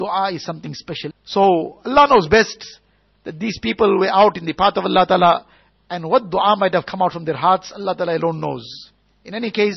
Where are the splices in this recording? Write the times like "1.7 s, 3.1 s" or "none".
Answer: 1.1 s